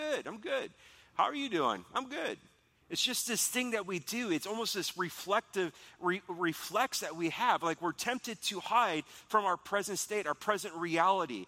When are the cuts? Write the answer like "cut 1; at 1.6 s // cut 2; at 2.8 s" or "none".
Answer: none